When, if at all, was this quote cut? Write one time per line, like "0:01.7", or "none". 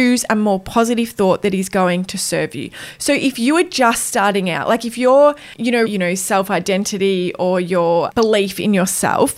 0:05.9